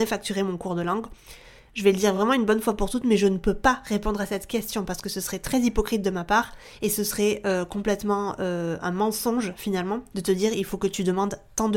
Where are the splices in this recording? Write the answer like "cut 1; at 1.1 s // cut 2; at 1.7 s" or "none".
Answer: none